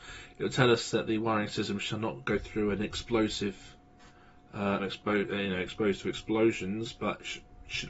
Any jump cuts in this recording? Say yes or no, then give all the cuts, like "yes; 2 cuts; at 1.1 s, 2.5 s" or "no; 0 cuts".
yes; 1 cut; at 4.8 s